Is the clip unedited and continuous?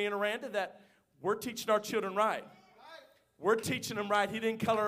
yes; 0 cuts

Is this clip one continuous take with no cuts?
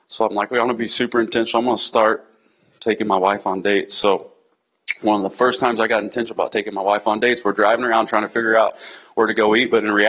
yes; 0 cuts

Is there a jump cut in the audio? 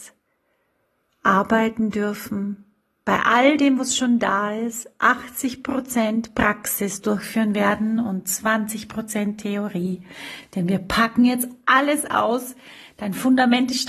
no; 0 cuts

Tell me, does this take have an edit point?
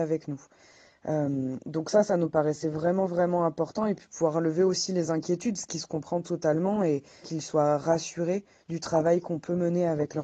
yes; 1 cut; at 7.2 s

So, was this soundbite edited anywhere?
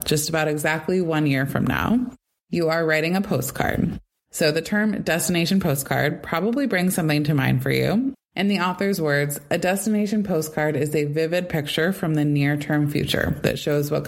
yes; 2 cuts; at 4.2 s, 8.1 s

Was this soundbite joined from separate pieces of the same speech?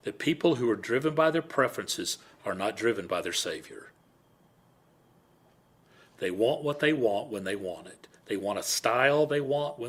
no; 0 cuts

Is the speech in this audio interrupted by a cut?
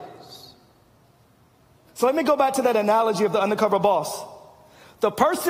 no; 0 cuts

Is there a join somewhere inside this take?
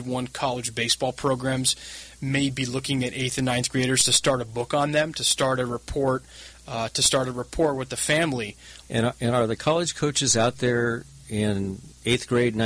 yes; 1 cut; at 8.8 s

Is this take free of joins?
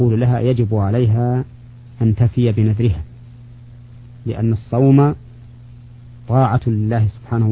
yes; 0 cuts

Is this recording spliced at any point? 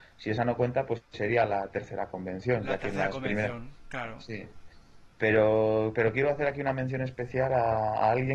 no; 0 cuts

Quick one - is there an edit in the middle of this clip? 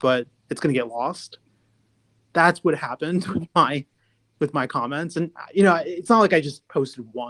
no; 0 cuts

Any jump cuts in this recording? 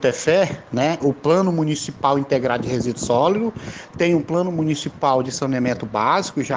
yes; 1 cut; at 1.0 s

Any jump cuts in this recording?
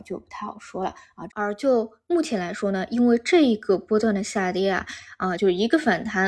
yes; 2 cuts; at 1.3 s, 5.4 s

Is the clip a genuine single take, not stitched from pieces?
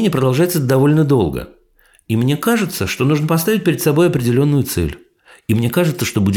yes; 0 cuts

